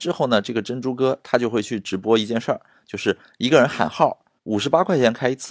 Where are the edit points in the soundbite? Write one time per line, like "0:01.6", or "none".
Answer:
0:04.4